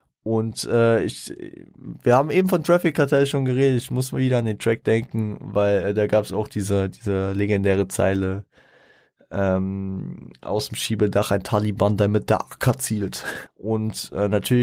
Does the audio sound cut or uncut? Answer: cut